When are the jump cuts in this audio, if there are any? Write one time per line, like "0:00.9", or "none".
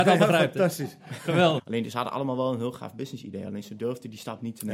0:01.6